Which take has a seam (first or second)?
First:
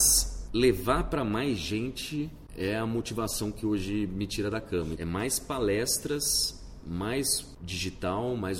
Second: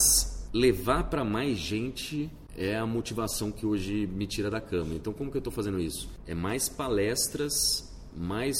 first